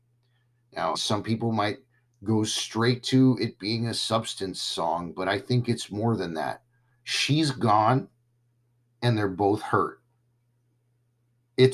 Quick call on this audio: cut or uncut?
cut